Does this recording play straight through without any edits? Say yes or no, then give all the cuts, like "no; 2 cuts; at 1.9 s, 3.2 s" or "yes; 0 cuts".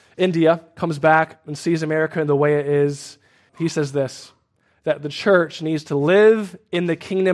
no; 1 cut; at 3.5 s